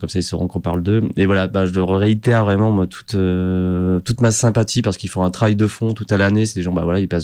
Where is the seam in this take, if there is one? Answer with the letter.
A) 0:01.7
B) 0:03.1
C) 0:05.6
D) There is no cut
D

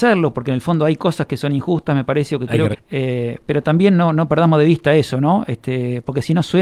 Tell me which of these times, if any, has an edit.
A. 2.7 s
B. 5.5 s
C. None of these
A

